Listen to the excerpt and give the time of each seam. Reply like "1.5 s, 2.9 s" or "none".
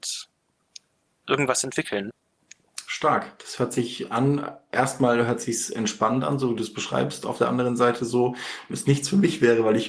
8.7 s